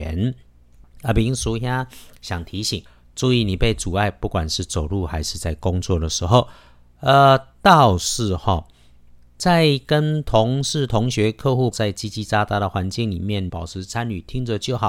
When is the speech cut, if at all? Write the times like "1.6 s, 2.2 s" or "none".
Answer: 11.7 s, 13.5 s